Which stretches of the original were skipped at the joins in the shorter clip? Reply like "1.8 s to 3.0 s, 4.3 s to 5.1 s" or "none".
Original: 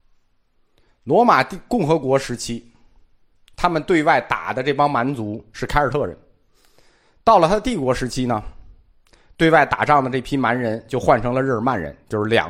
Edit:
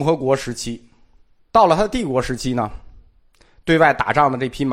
3.3 s to 7.2 s